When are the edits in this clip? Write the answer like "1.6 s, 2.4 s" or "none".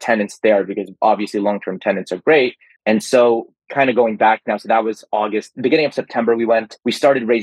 2.8 s